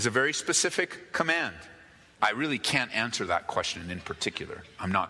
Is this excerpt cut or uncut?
cut